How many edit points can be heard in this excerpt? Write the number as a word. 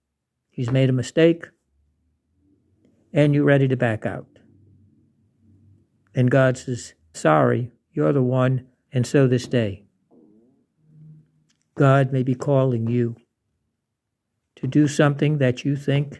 two